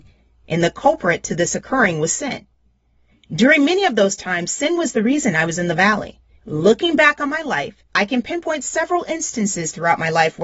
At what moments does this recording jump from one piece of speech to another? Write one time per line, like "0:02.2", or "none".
0:06.4
0:07.9